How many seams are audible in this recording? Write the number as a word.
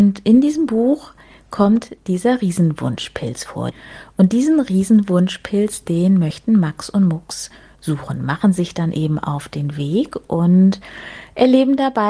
zero